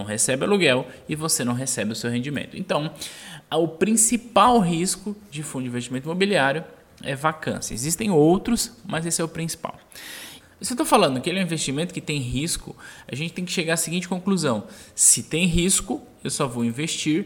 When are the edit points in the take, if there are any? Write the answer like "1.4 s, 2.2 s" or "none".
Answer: none